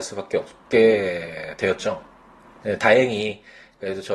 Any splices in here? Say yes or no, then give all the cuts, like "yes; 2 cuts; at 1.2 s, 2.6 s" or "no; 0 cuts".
yes; 1 cut; at 2.6 s